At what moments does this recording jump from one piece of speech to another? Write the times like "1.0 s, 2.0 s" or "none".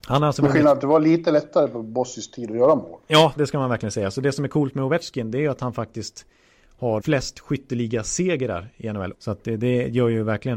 3.4 s, 7.0 s, 9.1 s